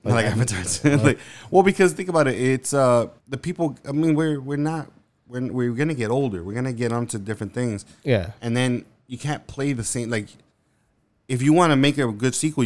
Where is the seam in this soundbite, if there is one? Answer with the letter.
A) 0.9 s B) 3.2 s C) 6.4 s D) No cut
B